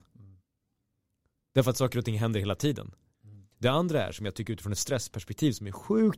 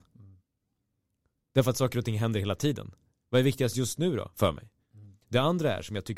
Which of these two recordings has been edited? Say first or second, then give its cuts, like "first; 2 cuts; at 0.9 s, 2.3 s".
first; 1 cut; at 3.1 s